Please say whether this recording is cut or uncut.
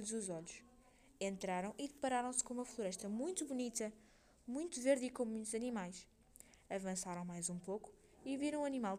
uncut